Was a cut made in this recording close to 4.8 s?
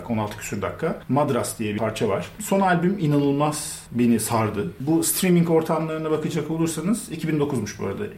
no; 1 cut; at 2.4 s

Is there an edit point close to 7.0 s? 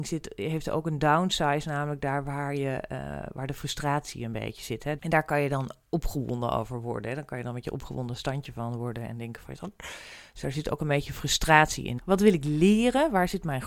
no; 2 cuts; at 5.0 s, 12.0 s

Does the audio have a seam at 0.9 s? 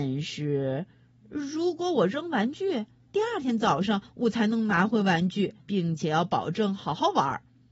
no; 2 cuts; at 3.1 s, 5.6 s

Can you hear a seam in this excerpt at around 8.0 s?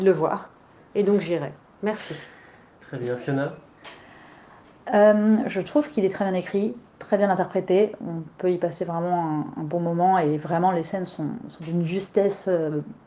no; 0 cuts

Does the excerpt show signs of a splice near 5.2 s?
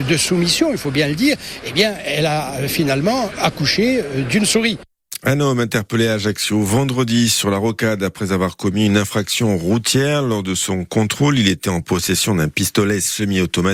no; 0 cuts

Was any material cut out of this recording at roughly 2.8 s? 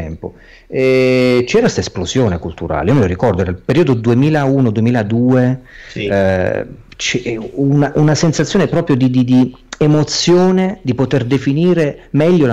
no; 0 cuts

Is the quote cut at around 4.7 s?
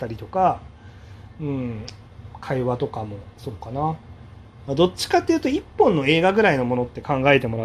yes; 1 cut; at 4.7 s

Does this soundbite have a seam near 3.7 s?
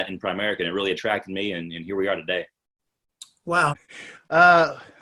yes; 1 cut; at 3.7 s

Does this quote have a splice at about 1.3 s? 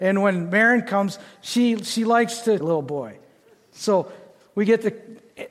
no; 1 cut; at 2.6 s

